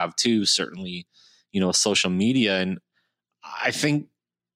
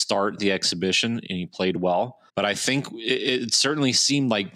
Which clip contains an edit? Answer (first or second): second